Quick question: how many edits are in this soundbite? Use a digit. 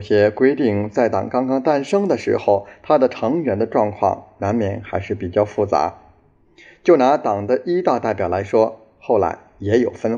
0